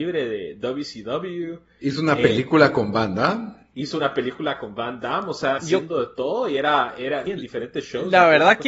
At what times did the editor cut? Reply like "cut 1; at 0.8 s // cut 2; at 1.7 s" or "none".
cut 1; at 5.6 s // cut 2; at 7.3 s